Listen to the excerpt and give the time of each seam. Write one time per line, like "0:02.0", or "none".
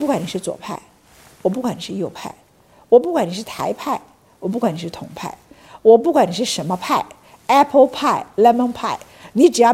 none